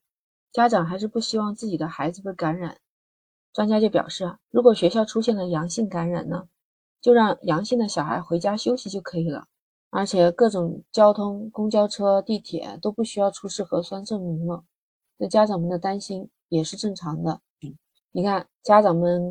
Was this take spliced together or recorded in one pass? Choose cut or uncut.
cut